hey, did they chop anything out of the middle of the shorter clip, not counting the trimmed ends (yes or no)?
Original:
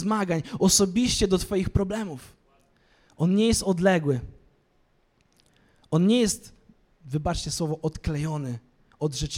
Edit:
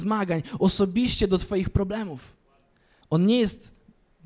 yes